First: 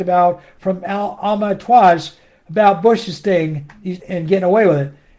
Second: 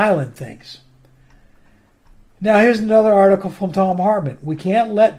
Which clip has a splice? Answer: first; 1 cut; at 4.0 s

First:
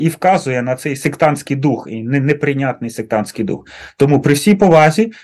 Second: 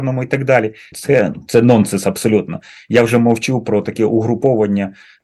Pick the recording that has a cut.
second; 1 cut; at 0.9 s

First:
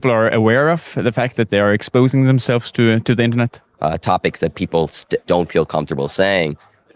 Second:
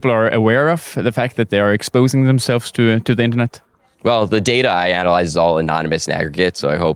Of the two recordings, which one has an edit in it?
first; 2 cuts; at 3.8 s, 5.2 s

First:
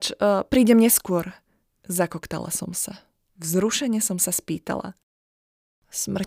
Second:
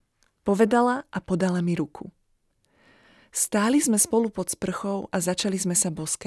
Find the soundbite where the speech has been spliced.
first; 1 cut; at 3.3 s

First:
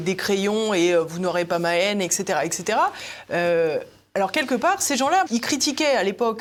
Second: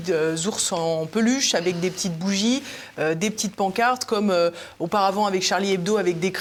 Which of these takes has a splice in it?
first; 1 cut; at 5.3 s

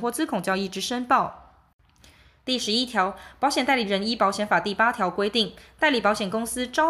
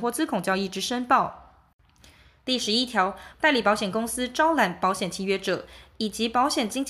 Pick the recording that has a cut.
second; 1 cut; at 3.3 s

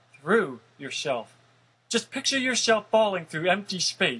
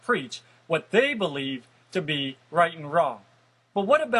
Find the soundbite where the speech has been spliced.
first; 1 cut; at 1.7 s

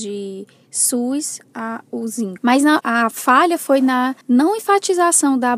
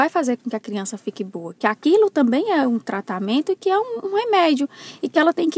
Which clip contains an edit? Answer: first; 2 cuts; at 2.4 s, 4.2 s

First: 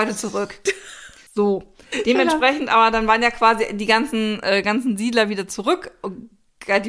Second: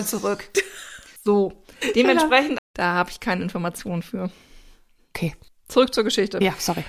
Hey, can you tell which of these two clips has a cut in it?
second; 1 cut; at 2.6 s

